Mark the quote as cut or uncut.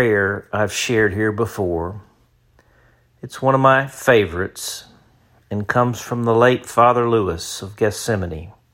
uncut